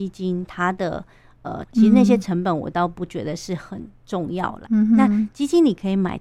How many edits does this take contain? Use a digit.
2